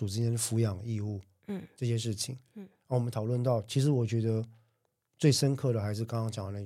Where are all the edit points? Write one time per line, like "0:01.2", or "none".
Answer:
none